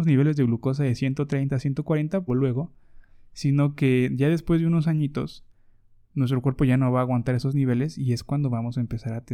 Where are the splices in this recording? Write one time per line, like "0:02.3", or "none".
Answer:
0:02.3